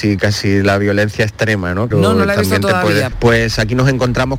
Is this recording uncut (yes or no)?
no